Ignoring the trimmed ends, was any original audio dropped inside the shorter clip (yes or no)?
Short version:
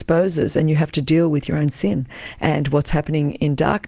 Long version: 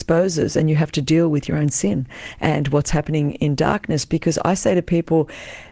no